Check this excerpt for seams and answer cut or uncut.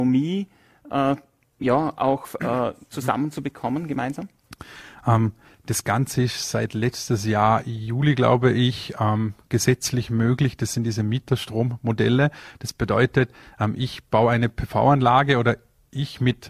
uncut